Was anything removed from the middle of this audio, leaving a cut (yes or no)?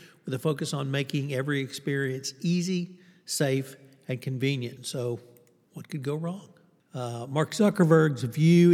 yes